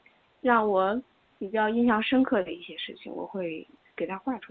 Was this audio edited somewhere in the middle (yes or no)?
no